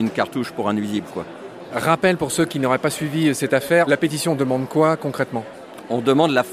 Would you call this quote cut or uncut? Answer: cut